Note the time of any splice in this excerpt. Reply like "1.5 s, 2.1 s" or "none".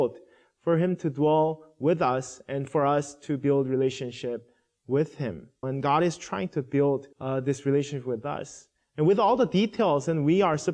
5.6 s, 7.1 s